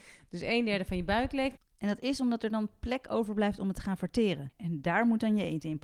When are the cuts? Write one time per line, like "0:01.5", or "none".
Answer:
0:01.6
0:04.5

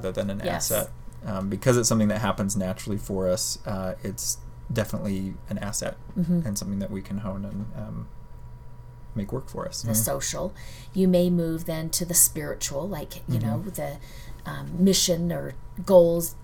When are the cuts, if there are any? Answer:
0:09.8

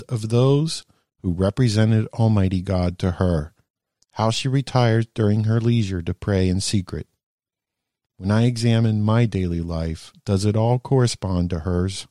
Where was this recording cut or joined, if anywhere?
0:04.0

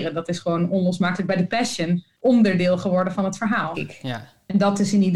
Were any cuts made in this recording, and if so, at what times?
0:03.7

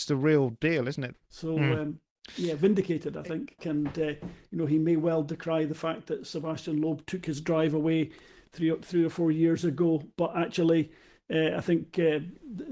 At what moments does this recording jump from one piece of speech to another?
0:01.1
0:03.6

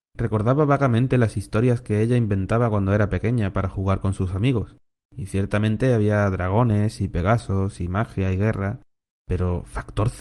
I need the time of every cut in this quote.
none

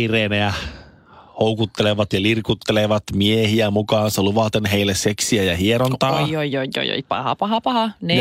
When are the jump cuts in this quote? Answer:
none

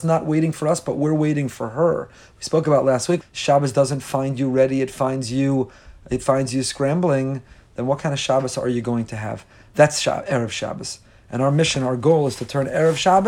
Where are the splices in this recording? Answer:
0:03.2

